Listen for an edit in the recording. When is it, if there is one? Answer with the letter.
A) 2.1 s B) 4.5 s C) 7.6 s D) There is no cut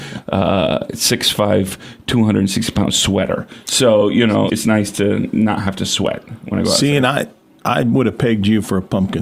B